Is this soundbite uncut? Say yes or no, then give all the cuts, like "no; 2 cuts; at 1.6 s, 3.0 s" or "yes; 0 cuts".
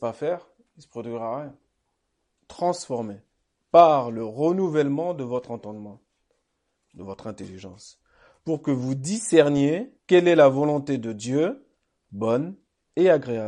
no; 2 cuts; at 2.4 s, 10.0 s